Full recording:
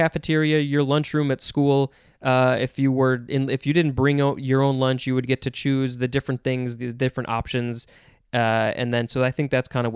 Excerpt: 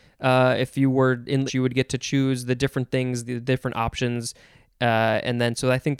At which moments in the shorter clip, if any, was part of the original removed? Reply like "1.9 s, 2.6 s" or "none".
1.5 s

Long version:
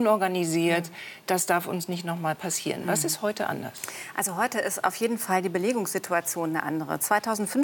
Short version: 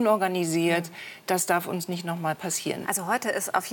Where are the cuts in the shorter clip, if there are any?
2.8 s

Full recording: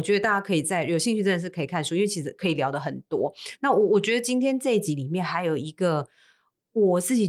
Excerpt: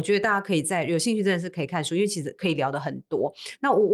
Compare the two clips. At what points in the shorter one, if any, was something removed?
none

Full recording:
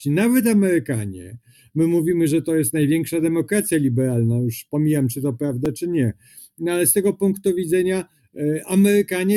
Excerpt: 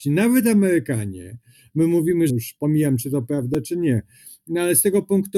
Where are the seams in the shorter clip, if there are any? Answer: 2.3 s

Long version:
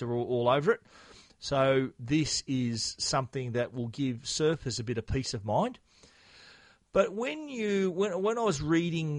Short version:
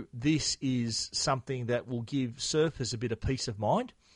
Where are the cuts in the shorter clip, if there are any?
none

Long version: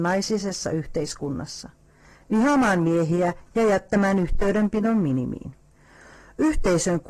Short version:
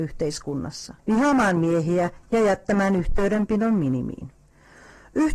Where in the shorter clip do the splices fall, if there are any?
1.0 s

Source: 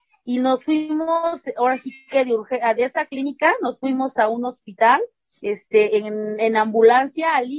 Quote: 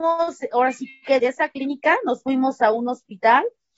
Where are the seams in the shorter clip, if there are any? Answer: 1.2 s

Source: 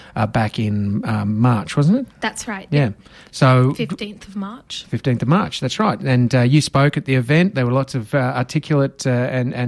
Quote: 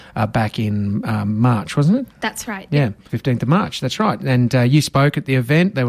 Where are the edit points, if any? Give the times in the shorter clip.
3.1 s

